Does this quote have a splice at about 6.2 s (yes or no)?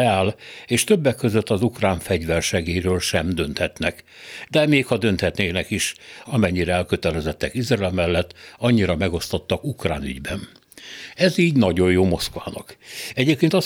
yes